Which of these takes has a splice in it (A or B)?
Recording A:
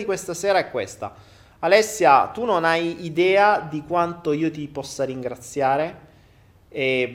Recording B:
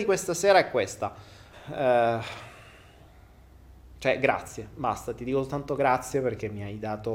B